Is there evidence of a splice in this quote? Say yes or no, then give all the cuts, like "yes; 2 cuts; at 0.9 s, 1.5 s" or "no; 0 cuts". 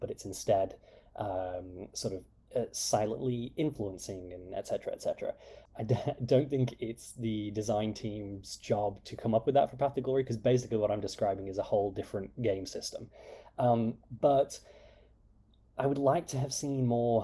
yes; 1 cut; at 5.7 s